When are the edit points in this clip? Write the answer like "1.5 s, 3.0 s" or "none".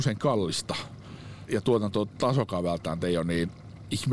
1.5 s